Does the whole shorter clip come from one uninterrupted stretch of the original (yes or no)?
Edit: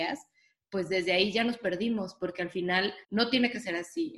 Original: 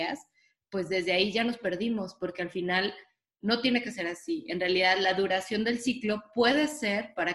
no